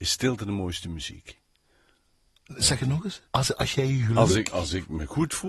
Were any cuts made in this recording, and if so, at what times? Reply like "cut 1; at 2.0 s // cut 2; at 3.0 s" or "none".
cut 1; at 3.3 s